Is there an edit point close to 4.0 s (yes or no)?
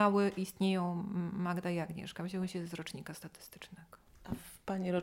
no